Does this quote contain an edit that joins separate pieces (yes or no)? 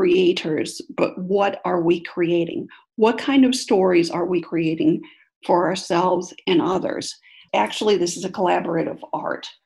yes